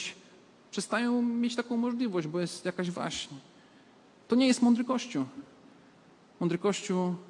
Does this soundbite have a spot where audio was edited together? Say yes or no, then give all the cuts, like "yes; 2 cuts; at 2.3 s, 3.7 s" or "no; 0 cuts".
no; 0 cuts